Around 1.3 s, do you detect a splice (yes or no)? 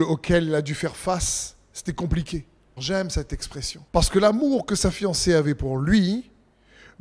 no